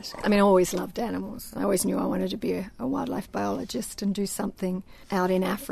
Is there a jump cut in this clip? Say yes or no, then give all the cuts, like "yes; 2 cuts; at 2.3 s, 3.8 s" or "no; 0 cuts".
no; 0 cuts